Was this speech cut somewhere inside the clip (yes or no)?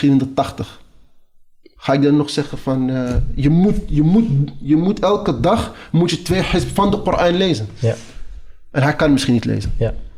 no